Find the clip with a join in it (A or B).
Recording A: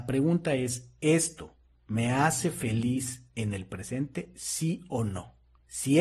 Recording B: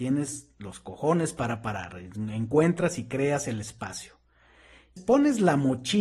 B